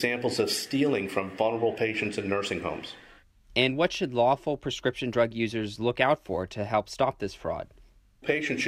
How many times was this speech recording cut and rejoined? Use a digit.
0